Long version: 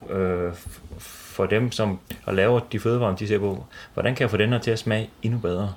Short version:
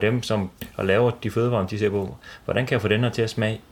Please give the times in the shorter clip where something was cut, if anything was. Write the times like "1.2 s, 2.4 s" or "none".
none